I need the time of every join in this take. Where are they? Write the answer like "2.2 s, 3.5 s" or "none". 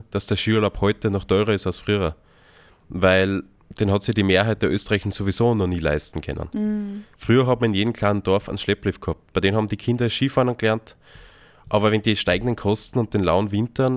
7.1 s